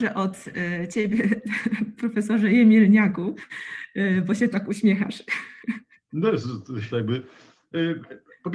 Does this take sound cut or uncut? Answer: cut